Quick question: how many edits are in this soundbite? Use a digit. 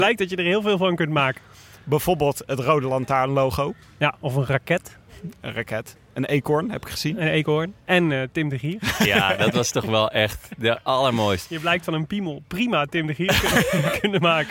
0